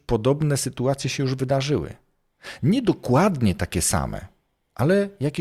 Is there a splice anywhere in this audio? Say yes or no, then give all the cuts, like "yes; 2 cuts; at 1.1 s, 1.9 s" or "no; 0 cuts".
no; 0 cuts